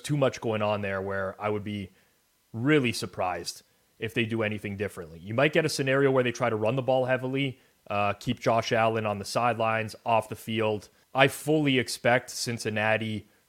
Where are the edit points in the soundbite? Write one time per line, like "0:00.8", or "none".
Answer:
0:11.0